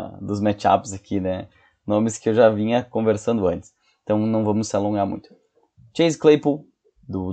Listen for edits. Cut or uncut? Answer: uncut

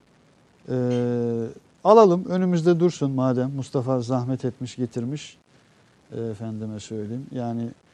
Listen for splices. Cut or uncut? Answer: uncut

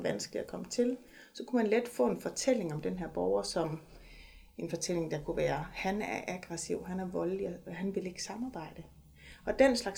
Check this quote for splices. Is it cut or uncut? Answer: uncut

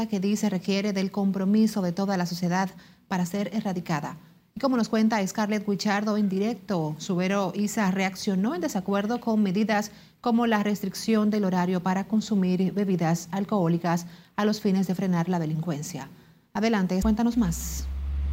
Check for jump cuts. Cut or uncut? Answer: cut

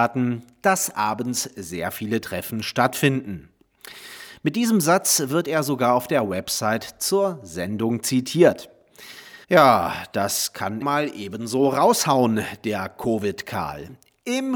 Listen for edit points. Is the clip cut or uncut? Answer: cut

